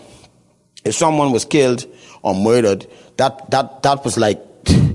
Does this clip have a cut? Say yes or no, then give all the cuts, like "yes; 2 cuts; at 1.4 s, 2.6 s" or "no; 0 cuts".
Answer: yes; 1 cut; at 3.5 s